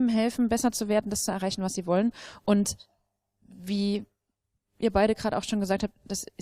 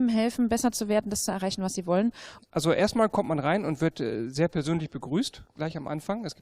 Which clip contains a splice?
second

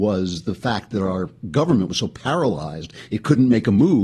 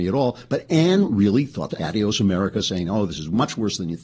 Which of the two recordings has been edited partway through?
second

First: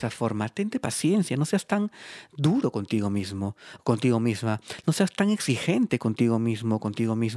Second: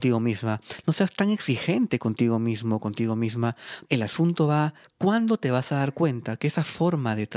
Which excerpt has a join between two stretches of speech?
second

